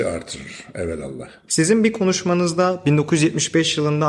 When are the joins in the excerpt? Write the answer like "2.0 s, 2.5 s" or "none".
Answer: 1.5 s